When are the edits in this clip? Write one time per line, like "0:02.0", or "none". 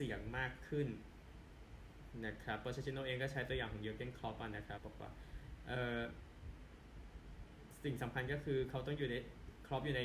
0:04.8